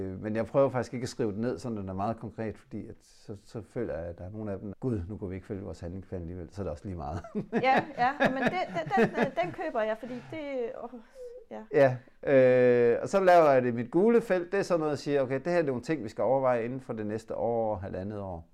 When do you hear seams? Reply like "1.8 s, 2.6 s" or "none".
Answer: 4.7 s